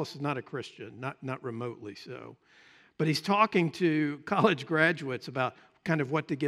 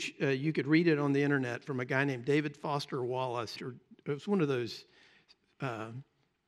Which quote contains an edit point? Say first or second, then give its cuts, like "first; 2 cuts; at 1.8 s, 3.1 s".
second; 1 cut; at 3.6 s